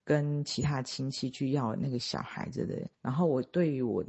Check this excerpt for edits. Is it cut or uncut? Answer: cut